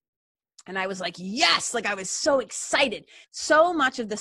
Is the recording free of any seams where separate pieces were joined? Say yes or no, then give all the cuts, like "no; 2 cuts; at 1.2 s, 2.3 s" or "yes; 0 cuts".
no; 1 cut; at 3.2 s